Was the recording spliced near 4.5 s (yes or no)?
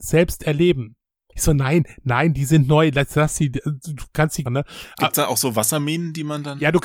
yes